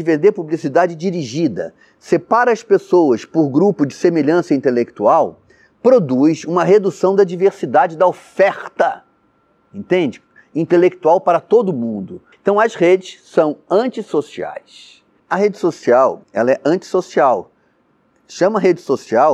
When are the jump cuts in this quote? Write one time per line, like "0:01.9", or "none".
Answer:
0:12.3
0:15.2
0:16.2